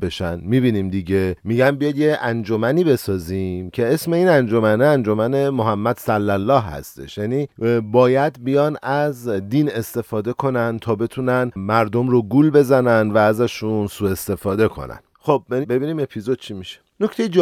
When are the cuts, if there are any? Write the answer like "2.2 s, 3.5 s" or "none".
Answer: 15.6 s